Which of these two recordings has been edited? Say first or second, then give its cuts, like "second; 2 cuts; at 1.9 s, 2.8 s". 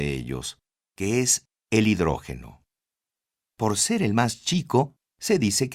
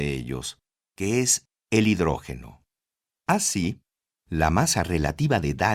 second; 1 cut; at 3.2 s